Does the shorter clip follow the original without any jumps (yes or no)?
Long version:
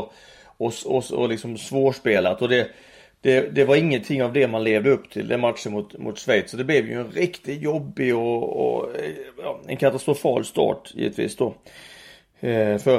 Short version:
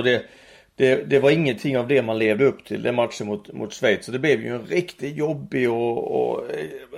yes